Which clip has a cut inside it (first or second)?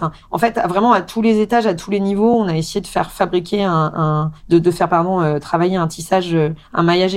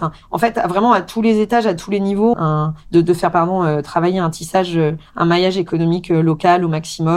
second